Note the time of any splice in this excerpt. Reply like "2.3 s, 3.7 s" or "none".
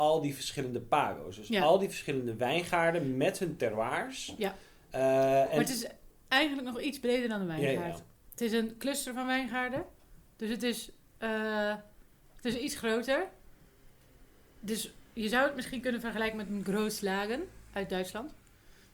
none